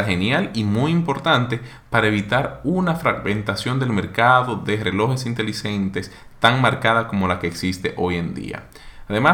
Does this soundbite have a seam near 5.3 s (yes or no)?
no